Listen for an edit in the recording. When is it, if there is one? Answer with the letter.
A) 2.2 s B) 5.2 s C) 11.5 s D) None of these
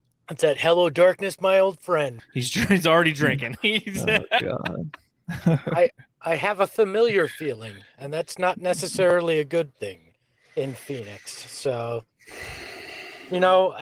A